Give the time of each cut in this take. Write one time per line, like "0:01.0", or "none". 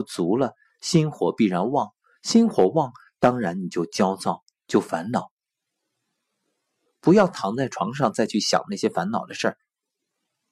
0:06.9